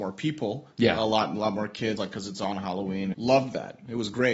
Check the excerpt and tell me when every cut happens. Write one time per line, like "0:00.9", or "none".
0:02.0
0:03.1